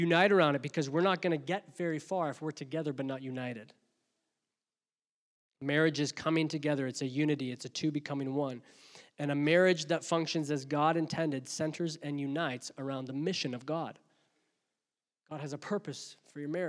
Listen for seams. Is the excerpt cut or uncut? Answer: uncut